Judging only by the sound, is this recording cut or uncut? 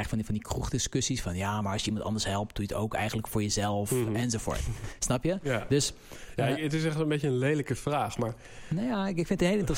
uncut